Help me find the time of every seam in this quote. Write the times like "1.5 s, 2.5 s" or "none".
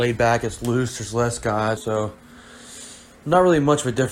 1.8 s

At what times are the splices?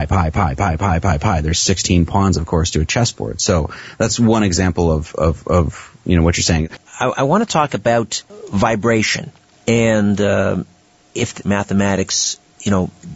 6.9 s, 11.4 s

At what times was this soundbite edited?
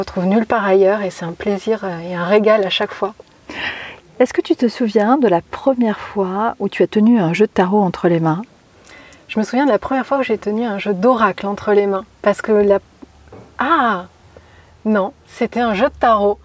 4.0 s

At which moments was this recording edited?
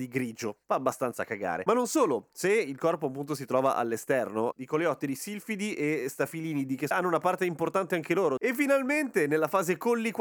4.5 s, 8.4 s

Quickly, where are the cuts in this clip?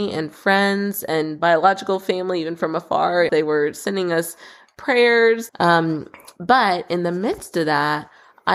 3.3 s, 5.5 s

